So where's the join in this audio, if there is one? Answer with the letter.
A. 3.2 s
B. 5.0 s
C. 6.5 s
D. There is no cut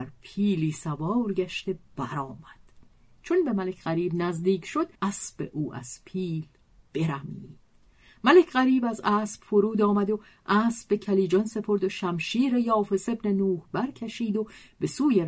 B